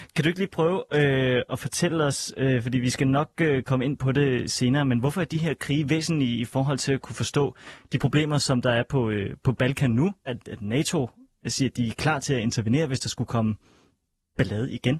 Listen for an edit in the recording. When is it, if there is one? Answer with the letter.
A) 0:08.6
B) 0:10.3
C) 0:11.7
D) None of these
B